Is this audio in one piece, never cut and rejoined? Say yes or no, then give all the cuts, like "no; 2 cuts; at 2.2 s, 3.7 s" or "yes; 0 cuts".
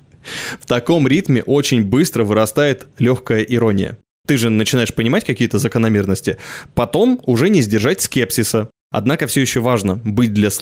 yes; 0 cuts